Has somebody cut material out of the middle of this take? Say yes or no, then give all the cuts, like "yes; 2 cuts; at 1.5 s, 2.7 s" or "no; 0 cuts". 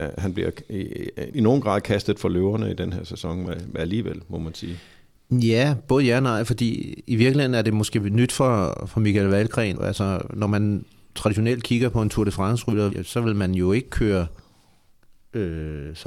yes; 3 cuts; at 1.3 s, 9.7 s, 12.9 s